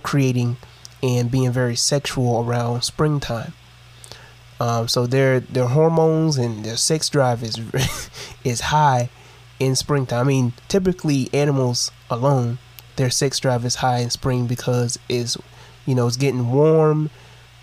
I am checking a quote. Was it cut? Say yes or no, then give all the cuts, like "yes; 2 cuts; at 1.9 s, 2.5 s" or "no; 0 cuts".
no; 0 cuts